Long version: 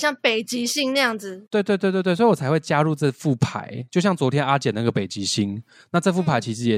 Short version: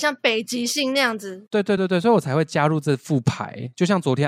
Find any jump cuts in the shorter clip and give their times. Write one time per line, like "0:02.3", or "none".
0:01.8